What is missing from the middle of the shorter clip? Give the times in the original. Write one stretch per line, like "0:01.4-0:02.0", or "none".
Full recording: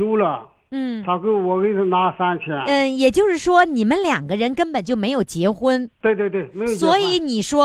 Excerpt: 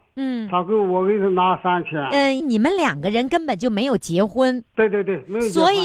0:02.9-0:03.7